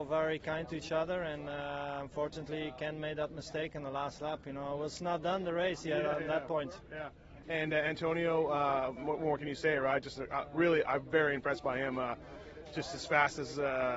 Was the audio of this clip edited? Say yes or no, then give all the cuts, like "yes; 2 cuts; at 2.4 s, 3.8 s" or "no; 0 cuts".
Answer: no; 0 cuts